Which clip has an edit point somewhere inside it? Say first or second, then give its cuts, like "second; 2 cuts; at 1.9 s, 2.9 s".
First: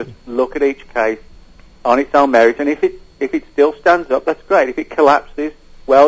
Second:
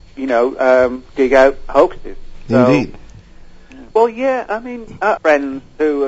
second; 2 cuts; at 3.9 s, 5.2 s